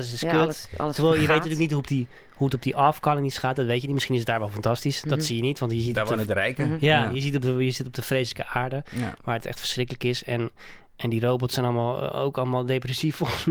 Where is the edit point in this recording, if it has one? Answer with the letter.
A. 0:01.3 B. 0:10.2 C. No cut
C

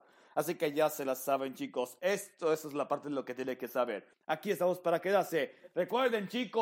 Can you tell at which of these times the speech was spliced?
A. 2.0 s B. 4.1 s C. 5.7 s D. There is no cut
B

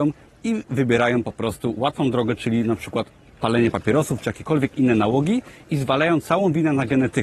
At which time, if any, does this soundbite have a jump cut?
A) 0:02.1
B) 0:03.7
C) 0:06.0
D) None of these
D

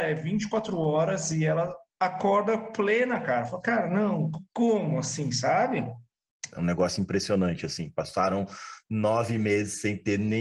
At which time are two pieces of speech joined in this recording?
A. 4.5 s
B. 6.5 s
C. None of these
B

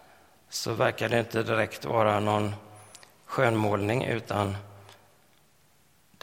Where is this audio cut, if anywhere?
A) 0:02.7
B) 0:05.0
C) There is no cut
C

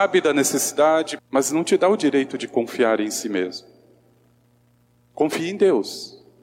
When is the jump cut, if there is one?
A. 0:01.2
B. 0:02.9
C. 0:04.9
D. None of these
A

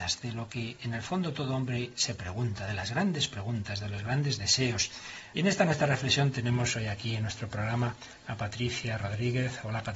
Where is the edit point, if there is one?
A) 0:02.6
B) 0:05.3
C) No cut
B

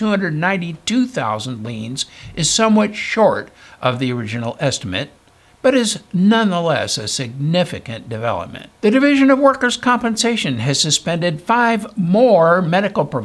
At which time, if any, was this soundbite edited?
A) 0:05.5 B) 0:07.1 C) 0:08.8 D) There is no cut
C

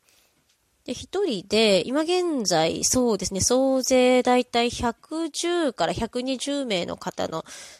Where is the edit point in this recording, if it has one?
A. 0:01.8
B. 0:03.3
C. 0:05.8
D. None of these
D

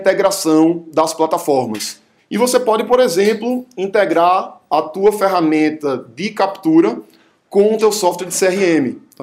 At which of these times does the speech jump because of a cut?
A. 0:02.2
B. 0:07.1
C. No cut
A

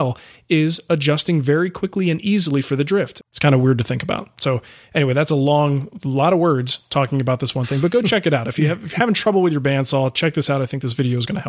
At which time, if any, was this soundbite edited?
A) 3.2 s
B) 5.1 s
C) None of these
A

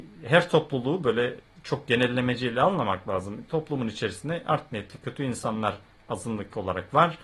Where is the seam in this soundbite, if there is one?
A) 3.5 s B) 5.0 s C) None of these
C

